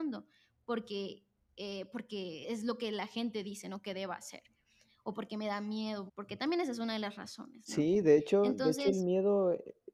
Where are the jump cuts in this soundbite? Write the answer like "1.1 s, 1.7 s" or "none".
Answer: 2.4 s, 6.1 s